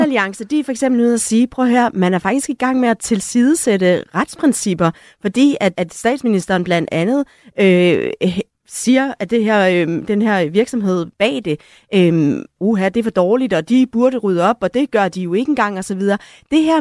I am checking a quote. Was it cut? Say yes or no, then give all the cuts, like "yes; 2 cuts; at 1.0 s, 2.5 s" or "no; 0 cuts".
yes; 2 cuts; at 5.7 s, 12.6 s